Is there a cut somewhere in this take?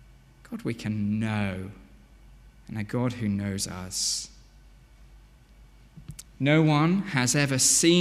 yes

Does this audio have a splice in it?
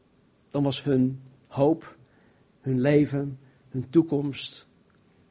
no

